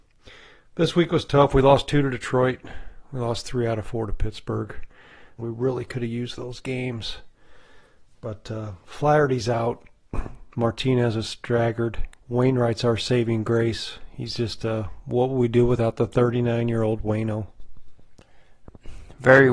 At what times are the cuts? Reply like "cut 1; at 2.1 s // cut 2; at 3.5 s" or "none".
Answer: cut 1; at 5.4 s // cut 2; at 12.2 s